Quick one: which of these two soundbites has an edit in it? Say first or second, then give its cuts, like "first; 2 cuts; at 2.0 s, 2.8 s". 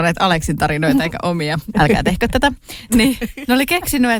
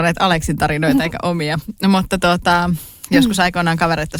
first; 2 cuts; at 1.7 s, 2.9 s